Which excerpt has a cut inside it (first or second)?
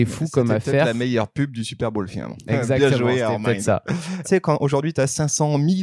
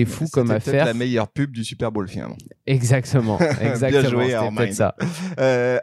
first